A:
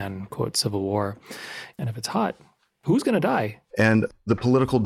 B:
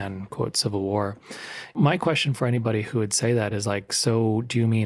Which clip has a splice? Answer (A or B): A